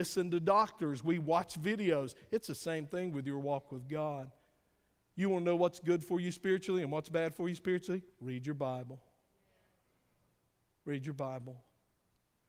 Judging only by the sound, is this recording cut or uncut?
uncut